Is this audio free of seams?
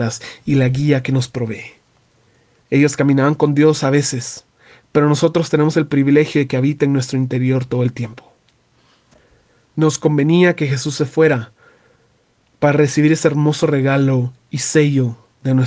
no; 1 cut; at 2.6 s

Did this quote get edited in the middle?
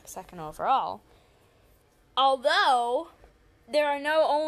no; 0 cuts

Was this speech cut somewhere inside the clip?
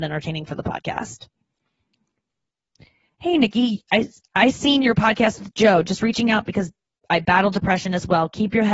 no; 0 cuts

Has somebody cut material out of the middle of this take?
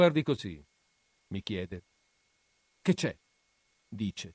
no; 0 cuts

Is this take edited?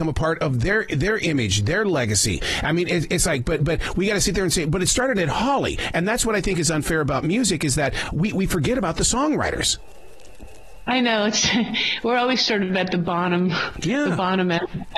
no; 0 cuts

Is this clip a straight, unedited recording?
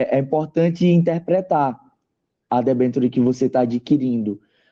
yes; 0 cuts

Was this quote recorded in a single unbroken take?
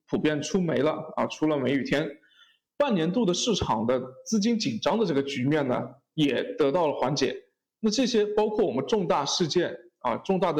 yes; 0 cuts

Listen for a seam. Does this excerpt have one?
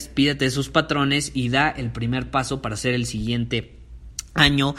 no; 0 cuts

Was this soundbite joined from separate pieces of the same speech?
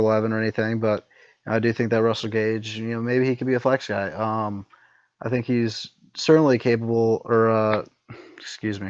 no; 0 cuts

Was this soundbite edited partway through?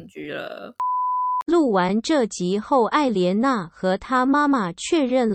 no; 0 cuts

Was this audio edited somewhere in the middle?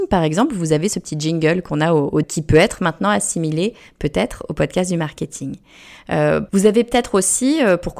yes; 2 cuts; at 2.2 s, 6.5 s

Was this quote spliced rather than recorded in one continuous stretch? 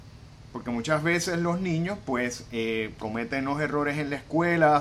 no; 0 cuts

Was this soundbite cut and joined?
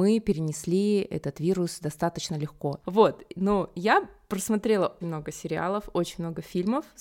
yes; 2 cuts; at 2.8 s, 5.0 s

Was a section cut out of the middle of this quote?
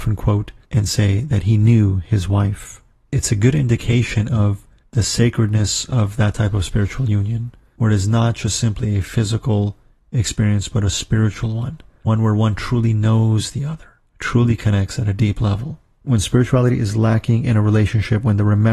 no; 0 cuts

